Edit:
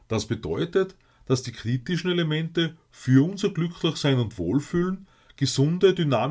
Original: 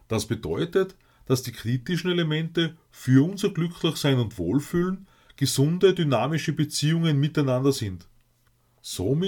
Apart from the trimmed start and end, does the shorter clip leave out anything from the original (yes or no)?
no